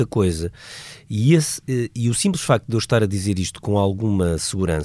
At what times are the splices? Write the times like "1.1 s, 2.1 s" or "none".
none